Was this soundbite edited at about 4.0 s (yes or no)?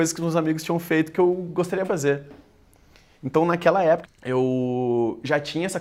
yes